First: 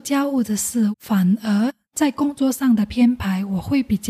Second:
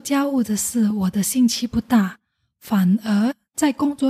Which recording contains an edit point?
first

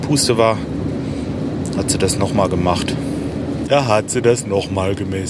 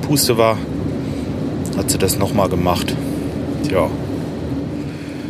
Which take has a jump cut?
first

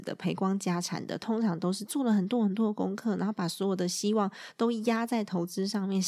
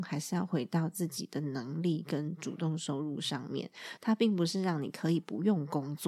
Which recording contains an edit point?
second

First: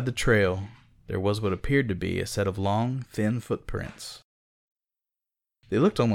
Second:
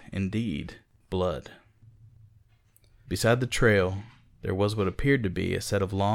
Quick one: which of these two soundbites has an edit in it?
second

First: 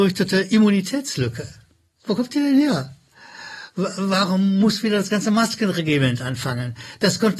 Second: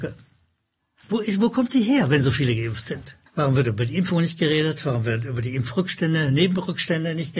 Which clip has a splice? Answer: second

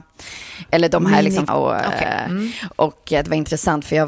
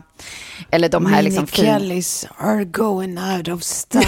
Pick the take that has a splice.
first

